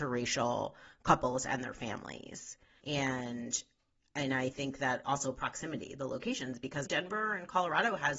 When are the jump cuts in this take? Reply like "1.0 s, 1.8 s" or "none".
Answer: 2.8 s, 6.8 s

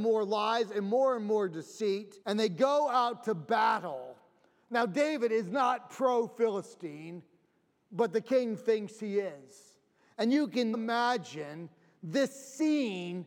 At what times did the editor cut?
2.2 s, 10.7 s

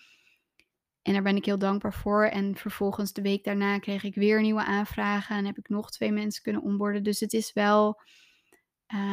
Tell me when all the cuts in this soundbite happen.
none

